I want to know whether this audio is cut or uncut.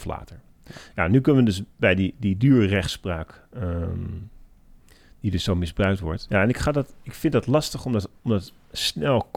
cut